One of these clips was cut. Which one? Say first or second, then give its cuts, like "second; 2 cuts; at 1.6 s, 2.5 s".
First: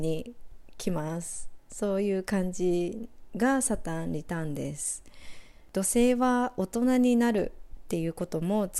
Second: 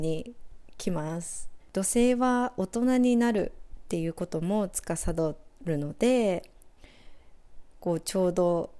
second; 1 cut; at 1.6 s